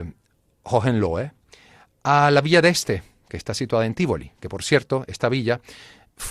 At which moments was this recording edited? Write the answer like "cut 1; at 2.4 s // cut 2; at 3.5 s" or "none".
none